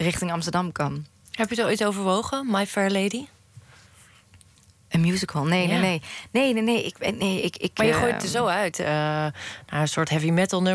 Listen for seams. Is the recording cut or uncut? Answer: cut